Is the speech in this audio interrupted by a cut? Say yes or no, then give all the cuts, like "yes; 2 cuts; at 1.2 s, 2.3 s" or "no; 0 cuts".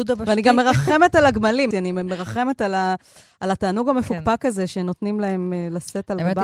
yes; 1 cut; at 1.7 s